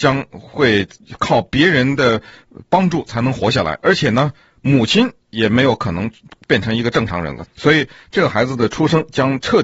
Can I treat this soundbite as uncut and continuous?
no; 1 cut; at 7.5 s

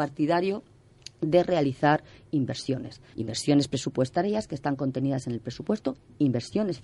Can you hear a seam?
yes; 1 cut; at 3.1 s

